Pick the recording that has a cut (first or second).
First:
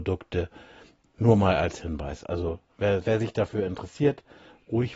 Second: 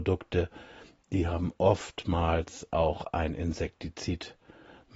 first